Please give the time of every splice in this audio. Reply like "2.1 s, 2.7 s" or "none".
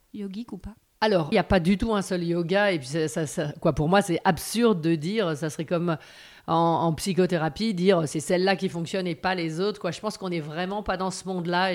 1.3 s